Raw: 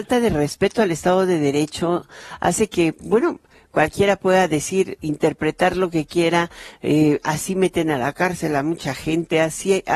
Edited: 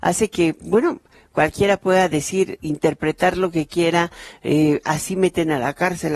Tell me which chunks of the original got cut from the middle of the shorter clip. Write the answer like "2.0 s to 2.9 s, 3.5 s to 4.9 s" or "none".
none